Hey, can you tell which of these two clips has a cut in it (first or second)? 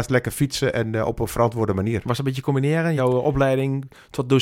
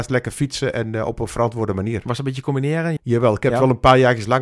second